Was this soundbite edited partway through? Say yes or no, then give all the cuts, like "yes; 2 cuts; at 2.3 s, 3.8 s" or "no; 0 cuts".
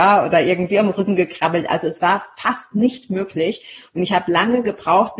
no; 0 cuts